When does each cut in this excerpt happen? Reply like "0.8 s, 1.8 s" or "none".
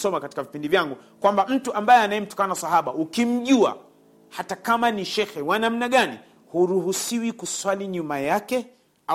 none